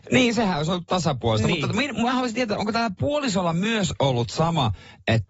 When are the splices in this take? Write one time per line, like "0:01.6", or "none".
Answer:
none